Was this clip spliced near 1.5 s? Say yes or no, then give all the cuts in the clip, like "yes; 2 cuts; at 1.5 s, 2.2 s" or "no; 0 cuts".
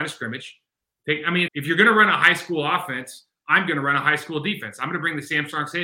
yes; 1 cut; at 1.5 s